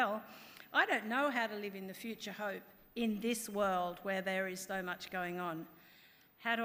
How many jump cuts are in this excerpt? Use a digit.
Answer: 1